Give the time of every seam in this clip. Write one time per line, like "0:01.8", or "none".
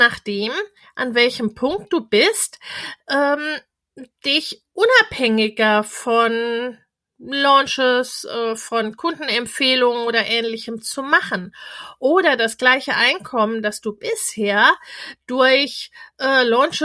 none

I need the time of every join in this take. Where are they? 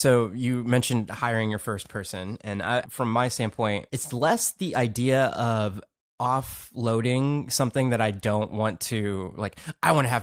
0:02.8
0:03.9

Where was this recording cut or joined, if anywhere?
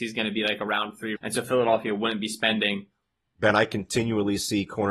0:01.2
0:03.3

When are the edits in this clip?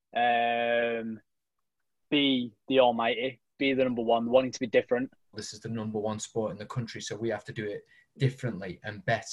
0:02.1
0:05.3

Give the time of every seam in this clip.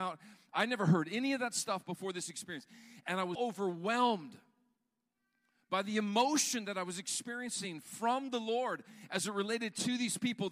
0:03.3

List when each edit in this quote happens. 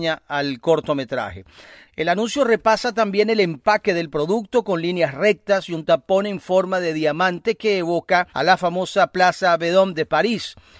0:01.9
0:08.3

